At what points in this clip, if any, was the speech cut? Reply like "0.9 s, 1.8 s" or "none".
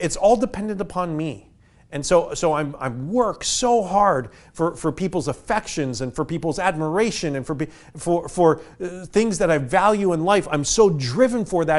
none